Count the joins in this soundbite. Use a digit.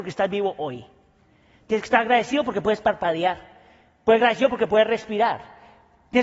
0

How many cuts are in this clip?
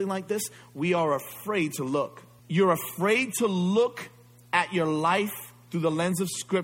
1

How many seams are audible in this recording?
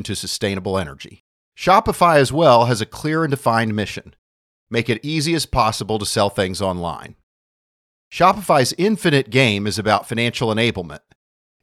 1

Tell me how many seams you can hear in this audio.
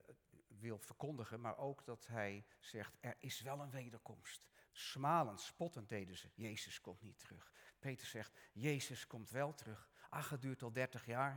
2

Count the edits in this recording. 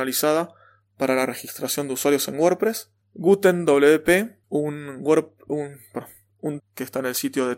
3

